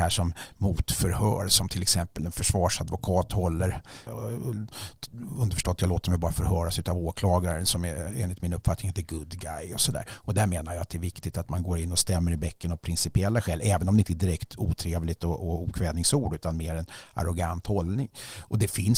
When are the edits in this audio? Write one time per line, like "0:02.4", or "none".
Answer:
0:04.1